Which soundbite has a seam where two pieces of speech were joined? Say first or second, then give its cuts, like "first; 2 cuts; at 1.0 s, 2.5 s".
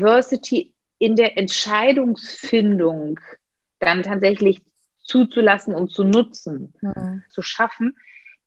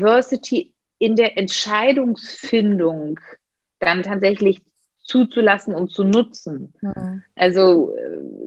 first; 1 cut; at 7.3 s